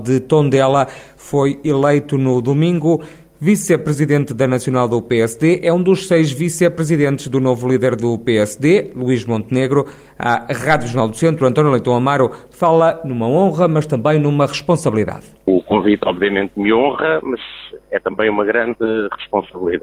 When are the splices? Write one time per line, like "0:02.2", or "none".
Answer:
none

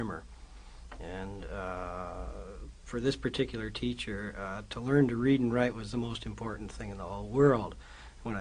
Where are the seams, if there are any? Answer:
none

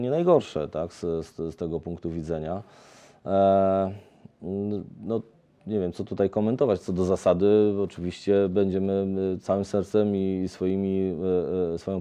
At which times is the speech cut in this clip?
none

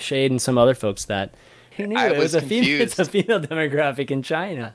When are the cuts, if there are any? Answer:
0:01.7

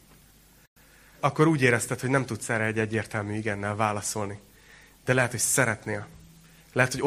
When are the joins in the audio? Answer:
0:01.2

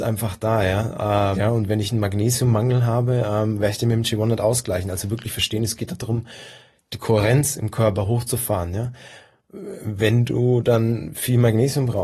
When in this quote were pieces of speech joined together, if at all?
0:01.3

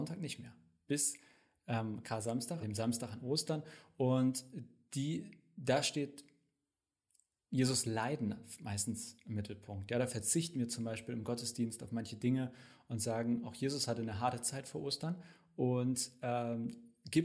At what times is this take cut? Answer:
0:02.6

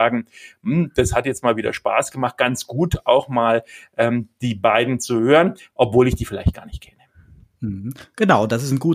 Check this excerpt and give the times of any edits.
none

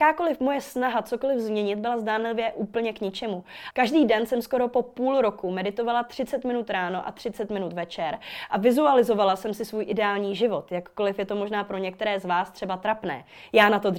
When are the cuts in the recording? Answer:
0:03.7

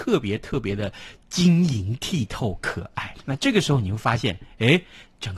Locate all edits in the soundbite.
0:03.1

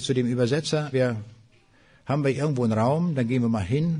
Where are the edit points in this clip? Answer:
0:00.9

